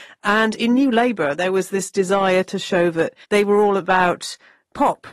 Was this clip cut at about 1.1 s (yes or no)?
no